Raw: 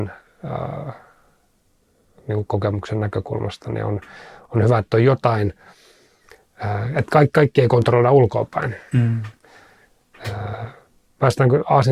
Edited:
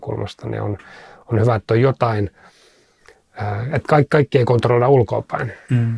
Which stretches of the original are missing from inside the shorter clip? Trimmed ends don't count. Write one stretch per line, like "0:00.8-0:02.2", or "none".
none

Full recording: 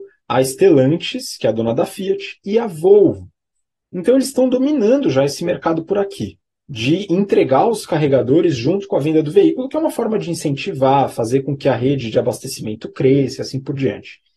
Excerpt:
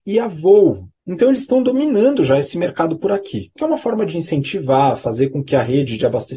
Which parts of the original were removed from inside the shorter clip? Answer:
0:03.4-0:03.9
0:06.4-0:09.7

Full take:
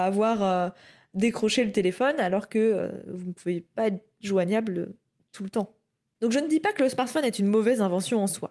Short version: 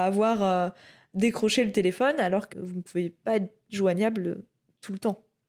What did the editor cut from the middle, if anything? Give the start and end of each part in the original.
0:02.5-0:03.0

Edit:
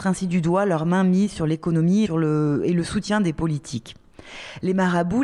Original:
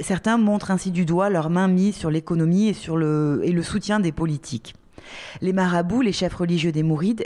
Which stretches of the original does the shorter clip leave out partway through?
0:02.7-0:02.8

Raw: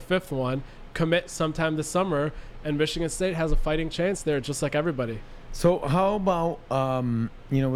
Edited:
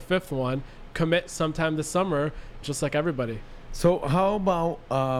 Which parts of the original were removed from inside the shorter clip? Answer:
0:02.6-0:04.4

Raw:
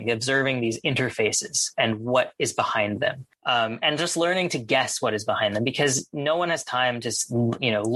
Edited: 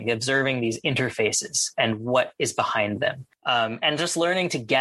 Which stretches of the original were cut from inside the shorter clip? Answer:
none

